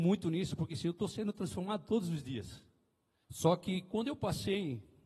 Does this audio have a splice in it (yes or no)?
yes